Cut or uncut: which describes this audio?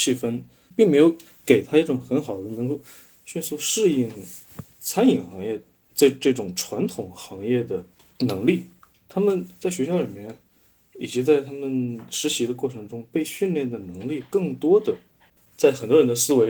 cut